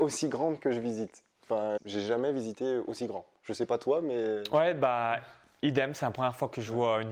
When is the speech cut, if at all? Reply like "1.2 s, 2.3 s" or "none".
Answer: 1.8 s